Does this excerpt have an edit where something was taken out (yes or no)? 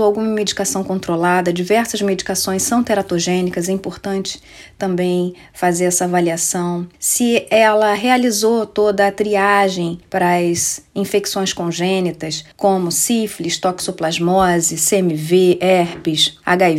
no